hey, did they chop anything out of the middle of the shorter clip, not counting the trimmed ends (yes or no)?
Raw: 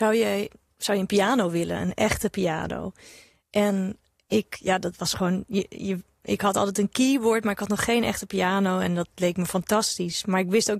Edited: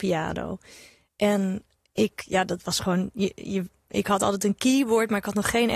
no